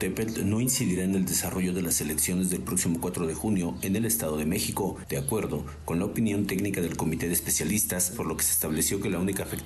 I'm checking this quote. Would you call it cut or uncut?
cut